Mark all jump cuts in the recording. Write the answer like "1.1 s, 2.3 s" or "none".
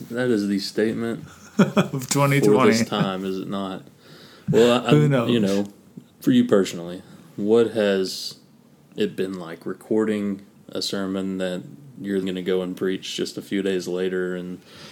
6.1 s, 12.2 s